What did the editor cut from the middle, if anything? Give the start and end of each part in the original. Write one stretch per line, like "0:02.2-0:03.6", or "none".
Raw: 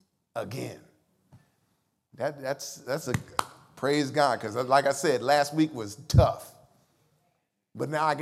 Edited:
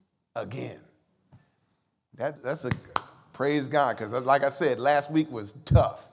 0:02.4-0:02.8